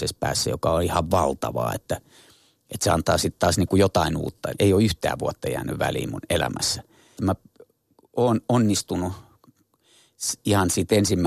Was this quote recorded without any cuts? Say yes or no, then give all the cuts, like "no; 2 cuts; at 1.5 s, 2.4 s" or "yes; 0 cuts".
no; 2 cuts; at 4.5 s, 7.2 s